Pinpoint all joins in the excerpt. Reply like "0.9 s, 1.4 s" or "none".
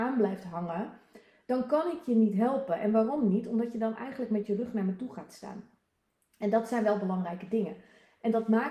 none